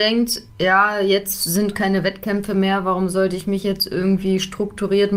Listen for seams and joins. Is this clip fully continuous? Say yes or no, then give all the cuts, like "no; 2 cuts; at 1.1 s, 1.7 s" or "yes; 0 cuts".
yes; 0 cuts